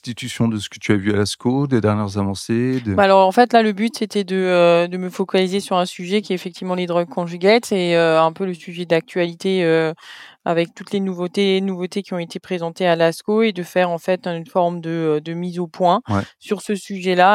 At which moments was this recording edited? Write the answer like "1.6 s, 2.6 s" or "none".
none